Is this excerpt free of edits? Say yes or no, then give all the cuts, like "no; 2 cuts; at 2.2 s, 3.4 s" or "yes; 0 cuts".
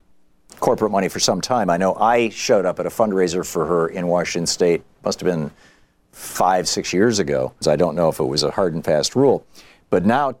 no; 1 cut; at 7.6 s